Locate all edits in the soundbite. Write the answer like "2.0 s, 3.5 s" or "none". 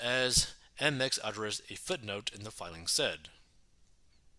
none